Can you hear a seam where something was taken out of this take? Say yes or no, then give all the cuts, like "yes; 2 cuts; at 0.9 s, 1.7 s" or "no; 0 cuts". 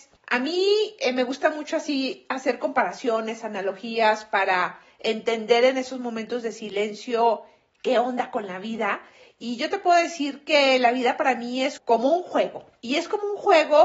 no; 0 cuts